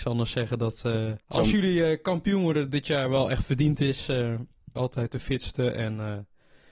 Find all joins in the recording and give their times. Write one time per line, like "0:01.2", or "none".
0:01.2
0:04.8